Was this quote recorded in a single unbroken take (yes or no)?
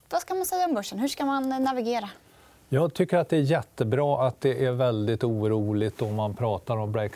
yes